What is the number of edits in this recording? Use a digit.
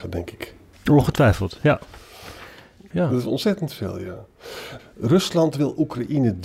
2